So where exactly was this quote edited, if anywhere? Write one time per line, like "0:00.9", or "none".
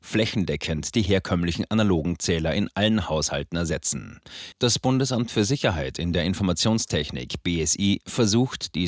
0:04.5